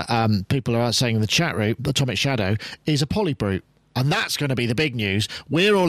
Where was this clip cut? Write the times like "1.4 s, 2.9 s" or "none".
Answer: 1.8 s